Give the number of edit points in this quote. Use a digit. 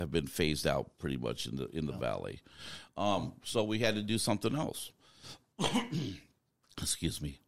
0